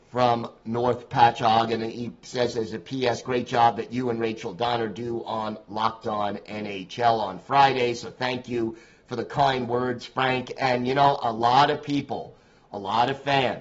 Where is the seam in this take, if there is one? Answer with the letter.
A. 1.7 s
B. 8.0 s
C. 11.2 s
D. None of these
D